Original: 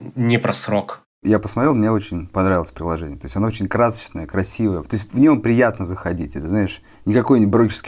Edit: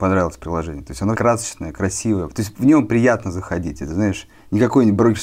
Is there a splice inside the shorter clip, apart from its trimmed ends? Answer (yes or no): yes